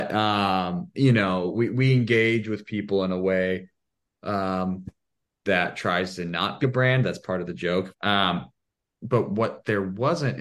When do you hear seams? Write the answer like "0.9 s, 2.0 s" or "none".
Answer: 6.6 s, 7.9 s